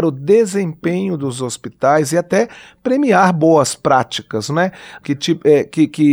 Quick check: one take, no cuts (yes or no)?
no